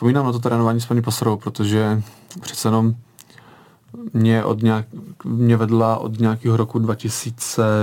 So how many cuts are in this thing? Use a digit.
1